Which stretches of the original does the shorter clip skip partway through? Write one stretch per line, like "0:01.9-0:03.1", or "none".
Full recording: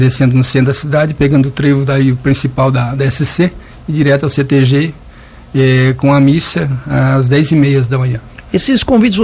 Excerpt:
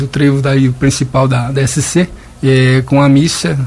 0:03.7-0:05.4

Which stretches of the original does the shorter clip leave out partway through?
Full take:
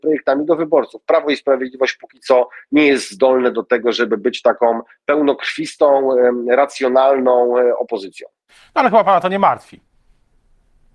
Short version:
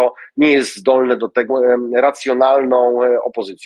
0:03.8-0:06.0

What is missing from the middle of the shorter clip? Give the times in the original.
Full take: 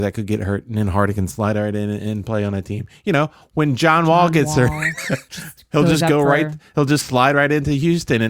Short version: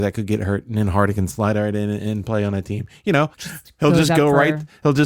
0:03.3-0:05.3

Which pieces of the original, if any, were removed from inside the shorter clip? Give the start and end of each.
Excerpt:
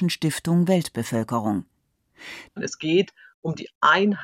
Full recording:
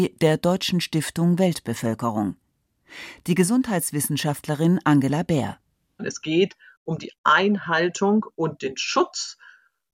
0:03.2-0:05.9

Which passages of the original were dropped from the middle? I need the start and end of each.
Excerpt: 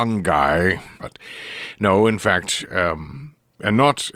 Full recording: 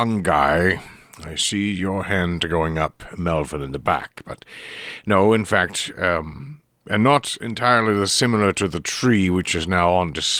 0:01.0-0:04.2

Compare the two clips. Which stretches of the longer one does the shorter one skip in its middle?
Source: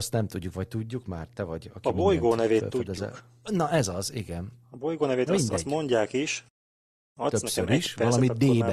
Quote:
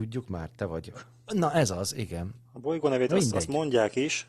0:01.7-0:03.1

